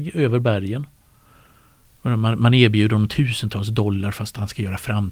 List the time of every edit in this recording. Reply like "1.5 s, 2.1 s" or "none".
1.8 s